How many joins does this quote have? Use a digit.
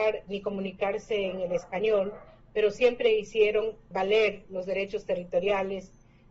1